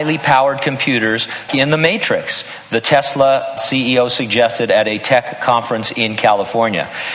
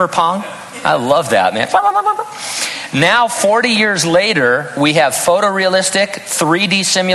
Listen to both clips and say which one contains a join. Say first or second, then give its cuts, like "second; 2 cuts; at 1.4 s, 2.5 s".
first; 2 cuts; at 1.5 s, 3.6 s